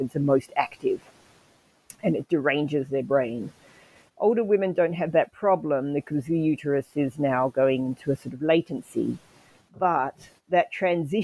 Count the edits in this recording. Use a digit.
0